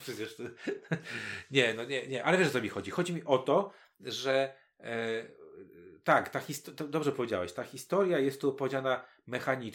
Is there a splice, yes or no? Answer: no